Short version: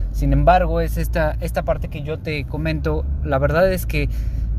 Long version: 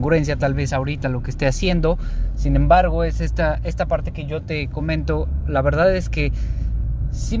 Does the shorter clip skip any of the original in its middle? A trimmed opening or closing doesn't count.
no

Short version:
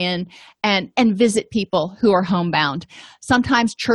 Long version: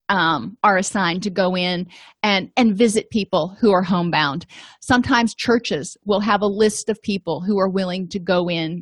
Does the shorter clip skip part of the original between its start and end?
no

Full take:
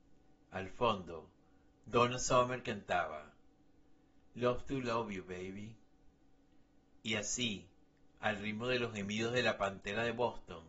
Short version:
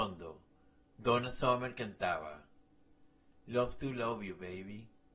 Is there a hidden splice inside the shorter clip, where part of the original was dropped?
no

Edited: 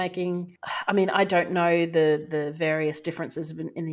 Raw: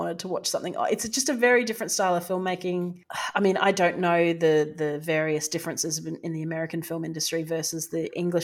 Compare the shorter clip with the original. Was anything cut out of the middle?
no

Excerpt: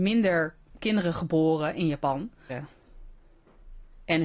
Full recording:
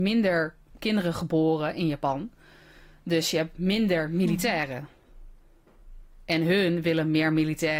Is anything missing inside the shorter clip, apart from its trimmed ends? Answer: yes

